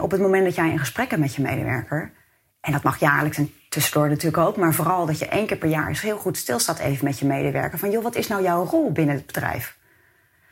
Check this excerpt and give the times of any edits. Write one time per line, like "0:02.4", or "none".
none